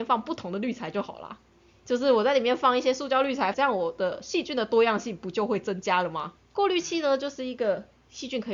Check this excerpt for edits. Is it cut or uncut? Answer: cut